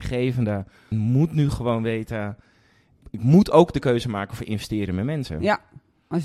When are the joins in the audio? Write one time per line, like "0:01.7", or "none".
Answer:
0:00.9